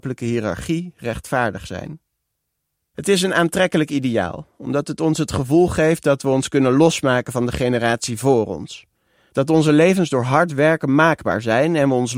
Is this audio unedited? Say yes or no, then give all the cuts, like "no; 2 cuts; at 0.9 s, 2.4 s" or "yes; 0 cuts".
yes; 0 cuts